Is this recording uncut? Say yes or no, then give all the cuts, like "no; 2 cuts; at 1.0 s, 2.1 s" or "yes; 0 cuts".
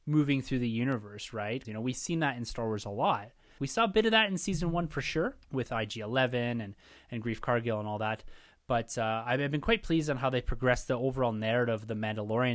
no; 3 cuts; at 1.6 s, 3.6 s, 5.4 s